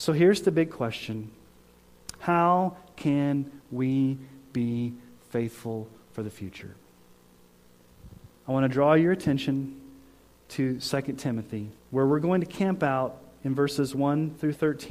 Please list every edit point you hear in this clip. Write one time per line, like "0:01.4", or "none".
0:08.4
0:11.8